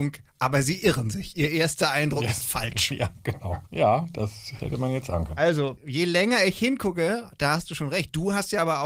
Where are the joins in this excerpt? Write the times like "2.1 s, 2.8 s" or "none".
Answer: none

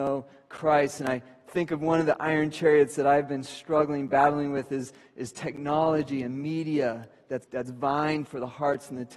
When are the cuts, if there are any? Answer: 7.4 s

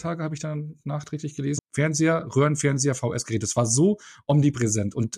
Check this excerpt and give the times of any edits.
1.6 s

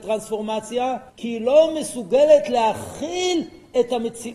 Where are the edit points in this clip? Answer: 1.1 s

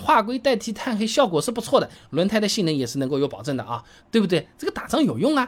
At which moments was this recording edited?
4.0 s

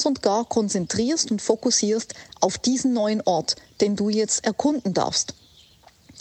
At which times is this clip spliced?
none

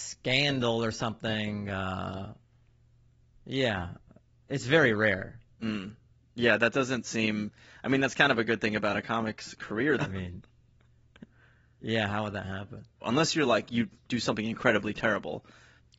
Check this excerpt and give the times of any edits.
10.0 s, 13.0 s

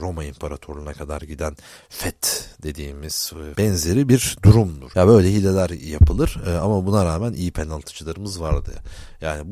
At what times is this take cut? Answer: 3.5 s, 4.9 s

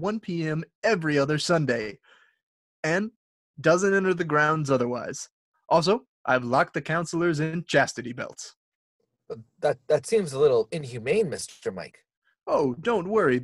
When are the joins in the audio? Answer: 5.5 s

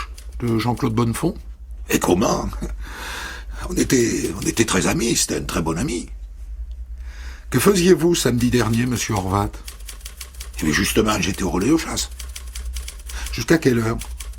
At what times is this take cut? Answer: none

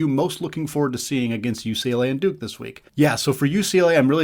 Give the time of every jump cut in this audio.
2.9 s

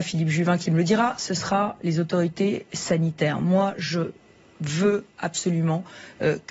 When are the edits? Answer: none

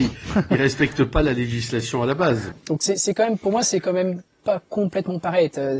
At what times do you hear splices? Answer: 2.5 s

